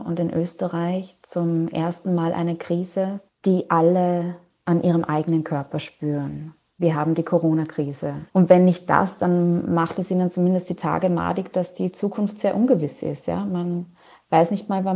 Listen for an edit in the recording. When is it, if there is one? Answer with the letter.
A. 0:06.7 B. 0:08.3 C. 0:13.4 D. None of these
B